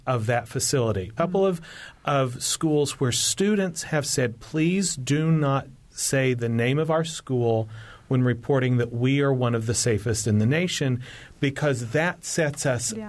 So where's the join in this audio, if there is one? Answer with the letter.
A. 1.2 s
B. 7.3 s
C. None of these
A